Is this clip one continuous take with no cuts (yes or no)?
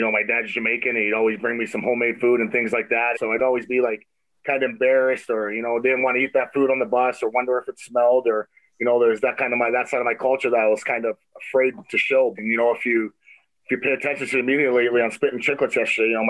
no